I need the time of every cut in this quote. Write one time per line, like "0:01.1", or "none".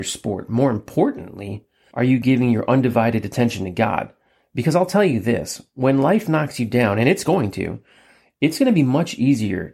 none

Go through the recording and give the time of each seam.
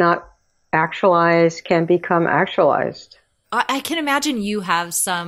0:03.4

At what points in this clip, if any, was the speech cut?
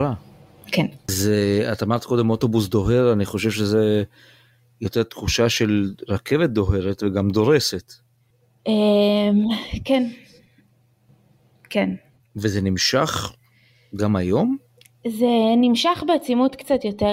none

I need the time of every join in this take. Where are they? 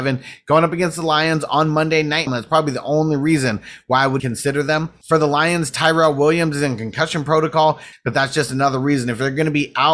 0:02.3
0:04.2
0:07.9

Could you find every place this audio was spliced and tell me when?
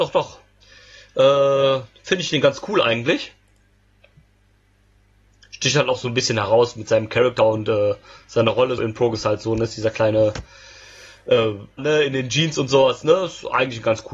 0:08.8
0:11.8

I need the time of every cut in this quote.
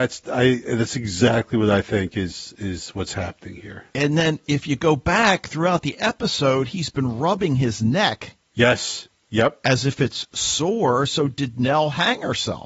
0:03.9

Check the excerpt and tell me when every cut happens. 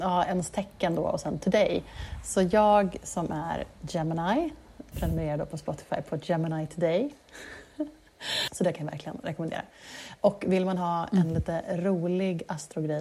0:04.9
0:08.5

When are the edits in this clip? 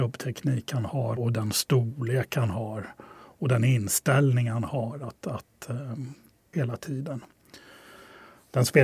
0:01.2
0:06.5

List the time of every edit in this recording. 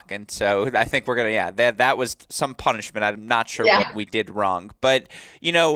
none

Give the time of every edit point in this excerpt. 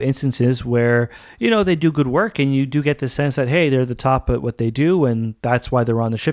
none

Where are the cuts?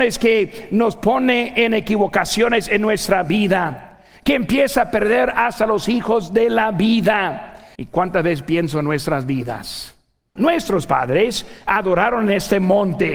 0:07.7
0:10.4

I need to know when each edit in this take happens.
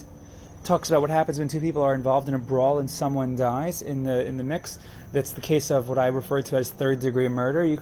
none

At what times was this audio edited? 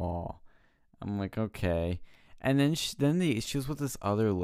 none

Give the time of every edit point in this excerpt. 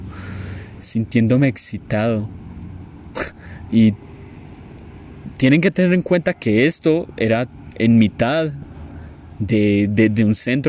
0:03.7

